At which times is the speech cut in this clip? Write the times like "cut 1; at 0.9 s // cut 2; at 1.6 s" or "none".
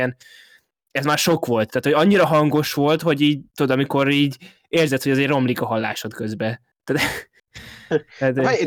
cut 1; at 3.5 s